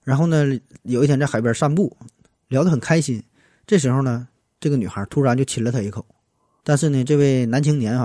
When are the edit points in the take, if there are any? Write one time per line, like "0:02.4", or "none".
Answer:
0:06.6